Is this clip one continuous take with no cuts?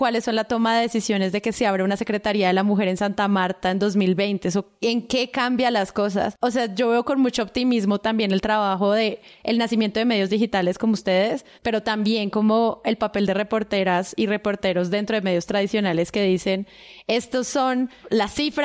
no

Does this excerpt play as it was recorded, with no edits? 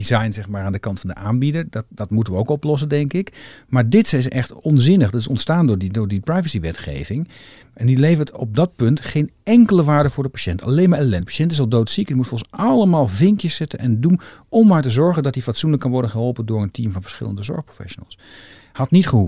yes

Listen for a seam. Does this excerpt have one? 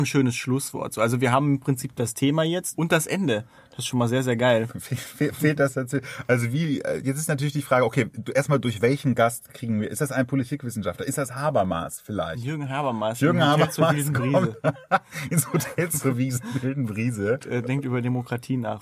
no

